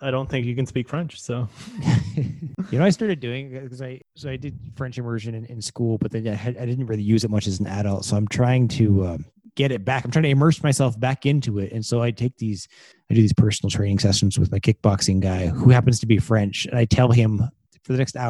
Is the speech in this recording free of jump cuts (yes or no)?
yes